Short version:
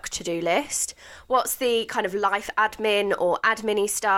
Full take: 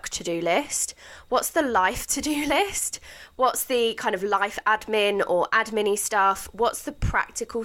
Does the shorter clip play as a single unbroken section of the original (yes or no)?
no